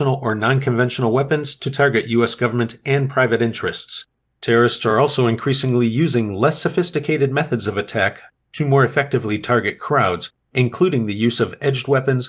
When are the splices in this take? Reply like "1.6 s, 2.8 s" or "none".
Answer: none